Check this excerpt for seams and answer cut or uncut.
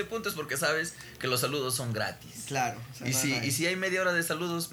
uncut